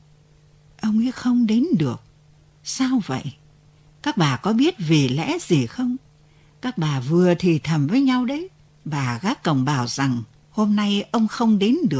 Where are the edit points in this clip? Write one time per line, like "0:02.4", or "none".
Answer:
0:08.7